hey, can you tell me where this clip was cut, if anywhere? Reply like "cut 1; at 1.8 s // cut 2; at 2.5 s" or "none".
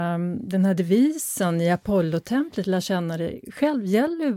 none